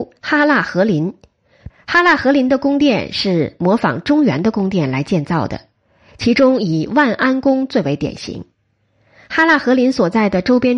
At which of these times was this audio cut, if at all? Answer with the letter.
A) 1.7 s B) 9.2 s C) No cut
A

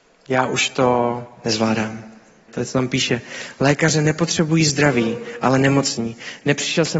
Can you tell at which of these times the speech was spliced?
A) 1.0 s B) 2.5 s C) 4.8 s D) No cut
B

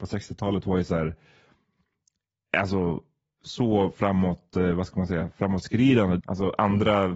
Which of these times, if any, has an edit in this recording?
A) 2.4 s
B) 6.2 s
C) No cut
B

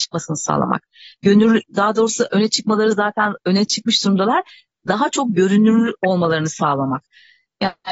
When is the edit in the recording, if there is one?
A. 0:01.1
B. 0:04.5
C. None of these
C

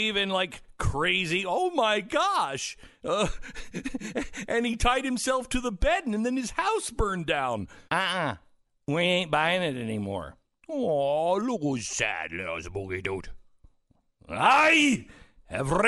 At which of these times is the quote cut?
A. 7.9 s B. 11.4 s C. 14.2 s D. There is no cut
A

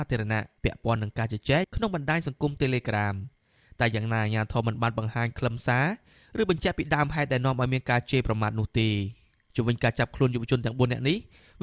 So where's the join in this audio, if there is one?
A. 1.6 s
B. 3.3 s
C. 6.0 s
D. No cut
A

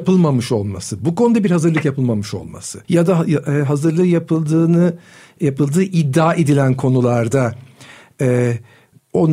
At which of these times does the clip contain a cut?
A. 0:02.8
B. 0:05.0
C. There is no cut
A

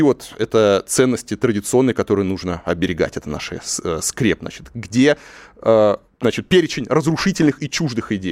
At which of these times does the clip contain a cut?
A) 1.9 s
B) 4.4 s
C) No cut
B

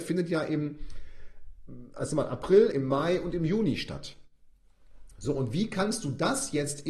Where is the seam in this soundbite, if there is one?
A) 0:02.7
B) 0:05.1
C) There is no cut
A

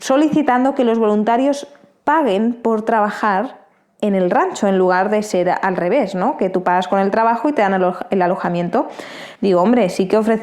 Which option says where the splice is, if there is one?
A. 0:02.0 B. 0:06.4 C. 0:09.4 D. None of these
C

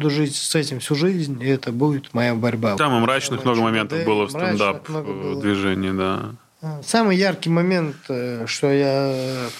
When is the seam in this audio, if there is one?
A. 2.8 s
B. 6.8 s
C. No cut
A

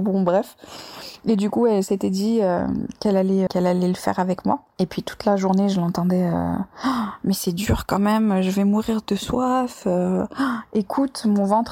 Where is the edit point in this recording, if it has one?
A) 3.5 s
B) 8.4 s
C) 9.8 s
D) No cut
A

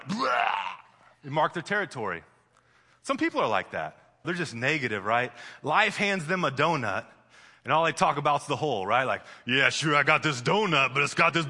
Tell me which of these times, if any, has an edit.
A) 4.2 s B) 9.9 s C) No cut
A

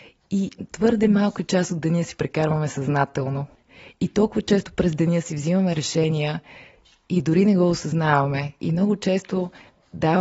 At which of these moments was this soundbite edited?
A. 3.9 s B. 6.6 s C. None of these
C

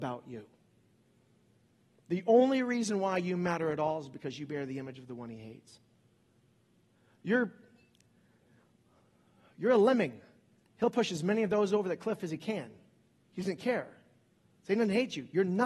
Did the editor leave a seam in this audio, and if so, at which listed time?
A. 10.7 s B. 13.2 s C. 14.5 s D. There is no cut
D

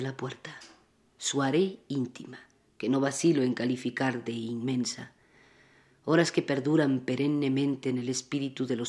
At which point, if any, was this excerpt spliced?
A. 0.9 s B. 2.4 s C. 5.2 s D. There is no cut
D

